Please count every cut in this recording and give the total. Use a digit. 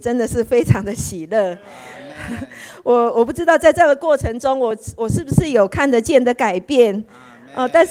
0